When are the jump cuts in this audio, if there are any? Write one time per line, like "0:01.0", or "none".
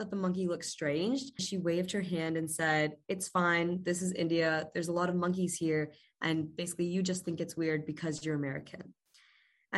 0:01.4